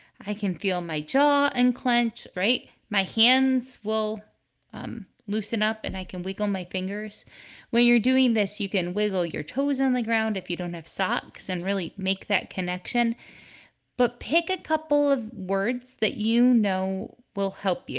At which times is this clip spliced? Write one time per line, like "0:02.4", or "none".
0:02.3